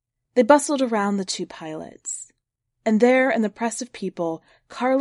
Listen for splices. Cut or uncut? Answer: cut